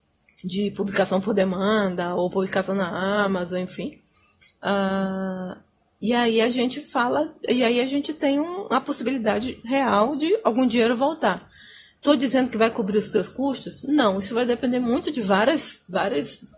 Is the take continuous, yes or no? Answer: yes